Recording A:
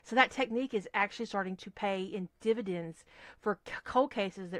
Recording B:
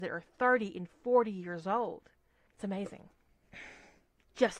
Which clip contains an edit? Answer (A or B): B